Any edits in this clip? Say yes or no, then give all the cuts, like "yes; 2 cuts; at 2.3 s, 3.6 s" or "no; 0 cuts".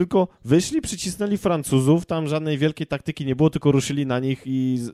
no; 0 cuts